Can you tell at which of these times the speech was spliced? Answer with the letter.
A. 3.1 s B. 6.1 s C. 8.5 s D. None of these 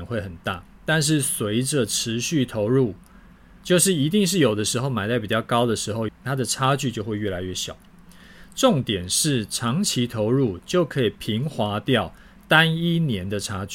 B